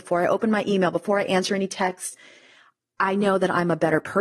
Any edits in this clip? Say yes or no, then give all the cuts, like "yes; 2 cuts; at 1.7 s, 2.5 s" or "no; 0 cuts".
no; 0 cuts